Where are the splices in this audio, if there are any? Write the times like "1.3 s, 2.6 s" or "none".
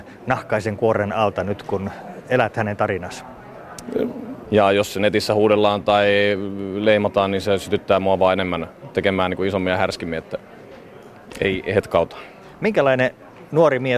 4.4 s